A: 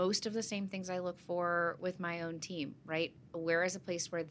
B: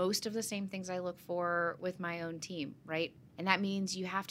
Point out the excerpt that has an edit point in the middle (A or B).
B